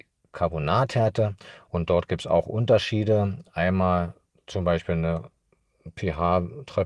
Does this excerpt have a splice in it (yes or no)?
yes